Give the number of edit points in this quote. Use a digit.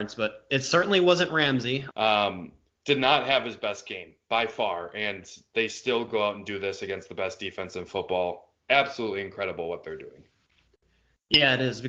1